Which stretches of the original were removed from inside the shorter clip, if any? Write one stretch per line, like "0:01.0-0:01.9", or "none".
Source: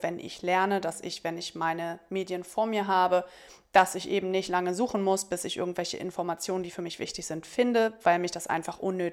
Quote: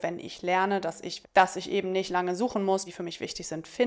0:01.2-0:03.6
0:05.2-0:06.6